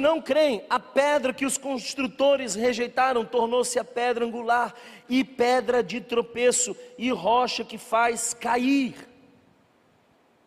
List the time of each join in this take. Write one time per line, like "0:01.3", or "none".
none